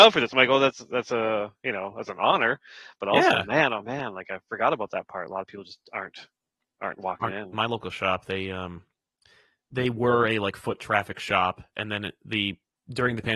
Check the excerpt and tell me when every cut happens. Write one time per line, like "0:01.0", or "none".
0:07.5